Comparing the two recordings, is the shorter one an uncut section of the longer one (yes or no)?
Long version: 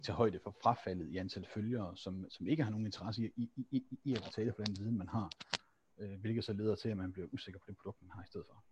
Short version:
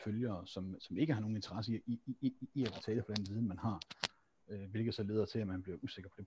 yes